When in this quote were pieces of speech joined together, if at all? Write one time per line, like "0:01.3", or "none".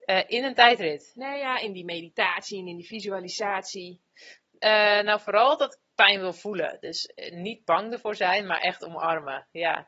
none